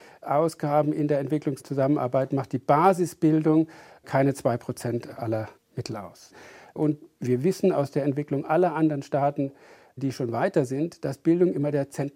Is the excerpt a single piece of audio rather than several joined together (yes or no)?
yes